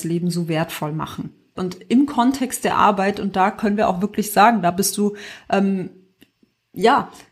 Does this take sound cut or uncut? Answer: cut